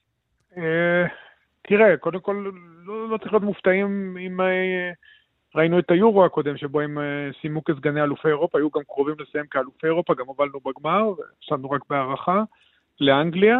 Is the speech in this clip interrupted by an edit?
no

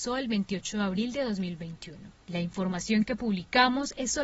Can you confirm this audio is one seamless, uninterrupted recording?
no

